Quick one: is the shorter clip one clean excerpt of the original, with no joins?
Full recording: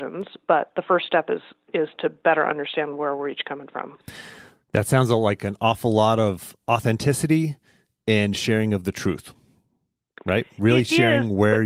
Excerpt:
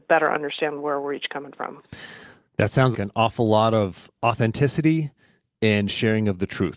no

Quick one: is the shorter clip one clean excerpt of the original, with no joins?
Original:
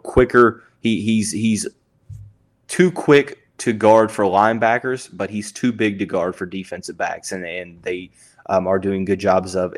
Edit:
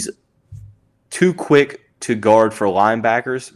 yes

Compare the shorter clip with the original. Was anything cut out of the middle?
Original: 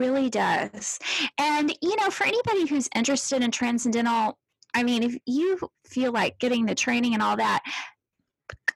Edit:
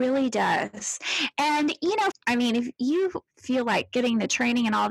yes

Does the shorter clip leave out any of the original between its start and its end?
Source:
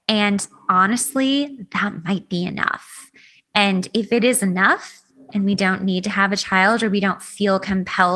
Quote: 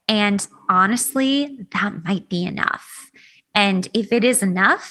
no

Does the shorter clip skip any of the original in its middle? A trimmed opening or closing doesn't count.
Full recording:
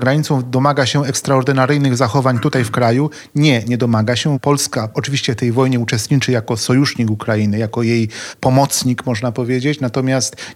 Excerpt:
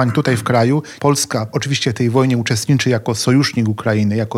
yes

